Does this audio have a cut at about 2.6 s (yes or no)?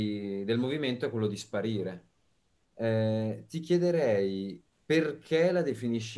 yes